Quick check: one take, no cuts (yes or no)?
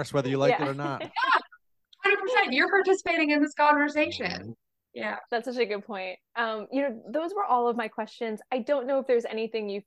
no